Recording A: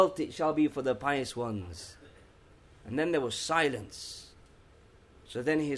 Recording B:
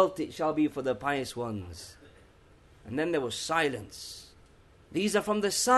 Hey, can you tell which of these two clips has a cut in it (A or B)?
B